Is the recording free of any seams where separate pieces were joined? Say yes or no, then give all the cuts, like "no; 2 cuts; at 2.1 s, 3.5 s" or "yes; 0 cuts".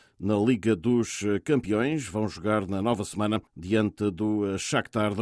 no; 1 cut; at 3.5 s